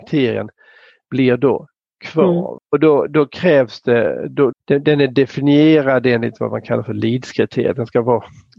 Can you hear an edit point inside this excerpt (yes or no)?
yes